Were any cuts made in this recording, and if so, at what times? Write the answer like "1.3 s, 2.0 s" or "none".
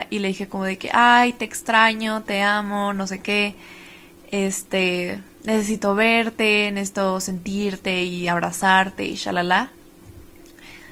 none